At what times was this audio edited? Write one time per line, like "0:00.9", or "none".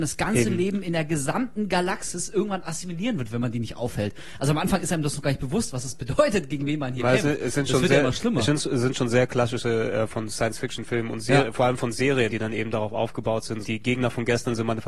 0:12.3
0:13.6